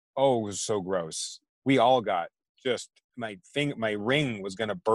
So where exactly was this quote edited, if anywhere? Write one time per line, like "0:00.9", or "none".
0:01.5